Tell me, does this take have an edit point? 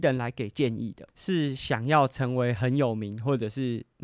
yes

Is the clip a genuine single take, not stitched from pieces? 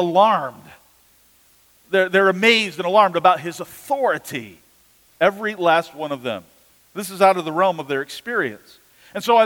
yes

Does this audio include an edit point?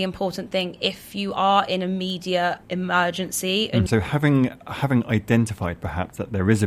yes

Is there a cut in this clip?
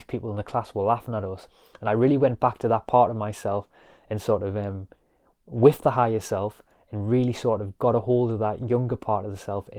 no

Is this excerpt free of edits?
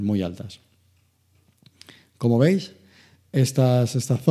yes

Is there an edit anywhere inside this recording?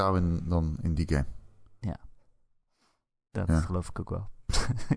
no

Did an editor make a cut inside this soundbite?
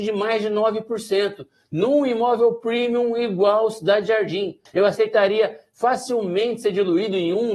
yes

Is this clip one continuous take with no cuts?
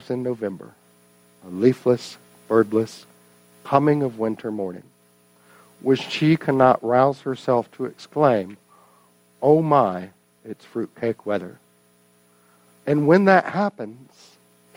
yes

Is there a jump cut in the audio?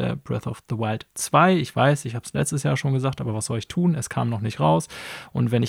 no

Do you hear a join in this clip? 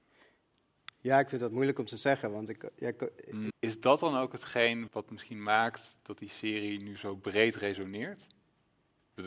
yes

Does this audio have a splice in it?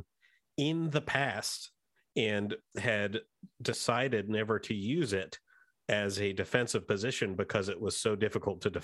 no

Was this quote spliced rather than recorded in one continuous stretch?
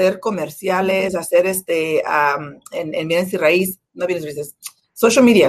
no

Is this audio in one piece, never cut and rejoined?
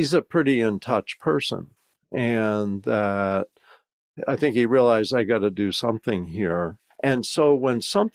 no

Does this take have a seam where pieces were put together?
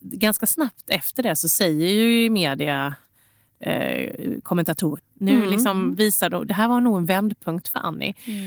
yes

